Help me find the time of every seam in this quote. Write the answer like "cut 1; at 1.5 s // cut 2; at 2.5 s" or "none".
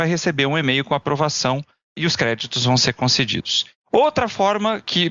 cut 1; at 3.8 s